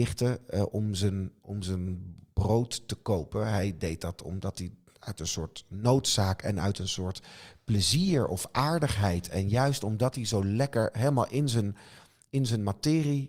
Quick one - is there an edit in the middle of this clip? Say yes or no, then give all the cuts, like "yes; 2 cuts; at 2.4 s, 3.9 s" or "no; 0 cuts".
no; 0 cuts